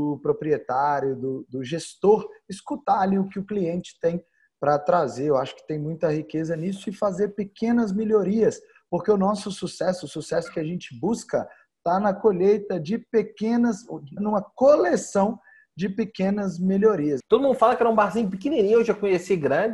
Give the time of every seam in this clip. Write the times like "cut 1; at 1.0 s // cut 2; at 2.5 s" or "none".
cut 1; at 14.2 s // cut 2; at 17.2 s